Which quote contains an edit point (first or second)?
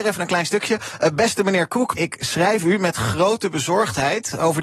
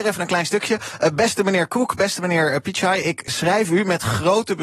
first